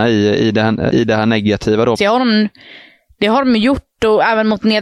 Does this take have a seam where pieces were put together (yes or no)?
yes